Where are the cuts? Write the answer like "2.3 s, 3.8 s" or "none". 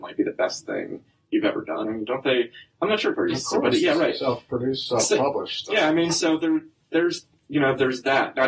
1.8 s, 3.1 s